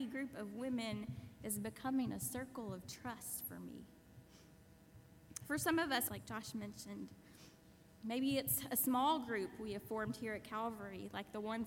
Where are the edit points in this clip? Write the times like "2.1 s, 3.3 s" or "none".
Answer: 6.1 s